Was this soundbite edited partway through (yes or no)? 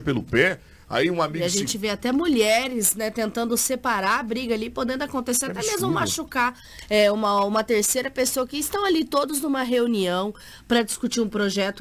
no